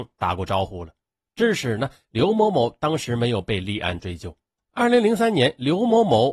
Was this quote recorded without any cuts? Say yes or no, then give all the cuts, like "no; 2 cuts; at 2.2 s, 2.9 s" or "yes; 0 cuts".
no; 1 cut; at 4.7 s